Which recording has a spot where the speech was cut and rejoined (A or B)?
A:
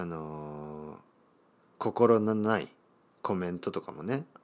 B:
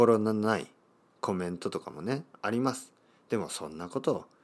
A